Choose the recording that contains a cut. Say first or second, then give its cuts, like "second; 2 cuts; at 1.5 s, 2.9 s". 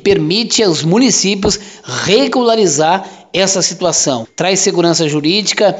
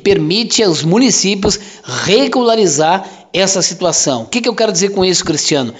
first; 1 cut; at 4.2 s